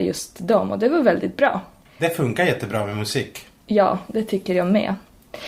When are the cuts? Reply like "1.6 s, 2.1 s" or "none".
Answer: 1.9 s